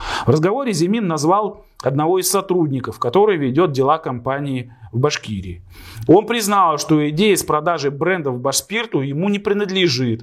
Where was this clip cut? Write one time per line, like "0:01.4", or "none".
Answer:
0:06.1